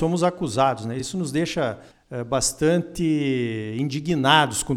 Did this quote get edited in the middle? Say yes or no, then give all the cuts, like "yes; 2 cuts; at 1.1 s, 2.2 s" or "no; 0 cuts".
no; 0 cuts